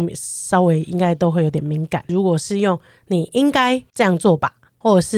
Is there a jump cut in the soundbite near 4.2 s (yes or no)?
no